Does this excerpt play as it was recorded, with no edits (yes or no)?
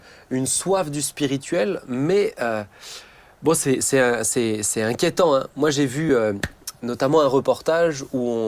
yes